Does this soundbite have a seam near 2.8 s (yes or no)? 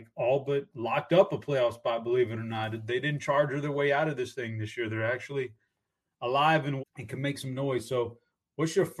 no